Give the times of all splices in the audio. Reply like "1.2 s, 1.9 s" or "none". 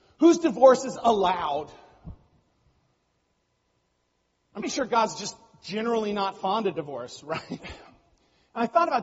4.6 s, 7.6 s